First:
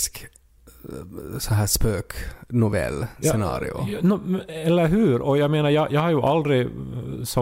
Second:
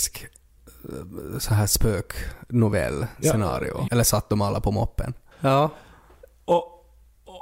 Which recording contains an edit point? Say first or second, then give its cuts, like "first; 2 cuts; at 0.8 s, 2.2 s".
second; 2 cuts; at 3.9 s, 5.3 s